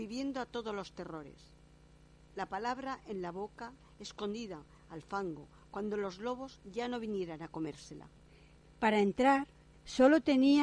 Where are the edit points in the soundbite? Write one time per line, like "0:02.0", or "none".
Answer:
0:04.8
0:08.6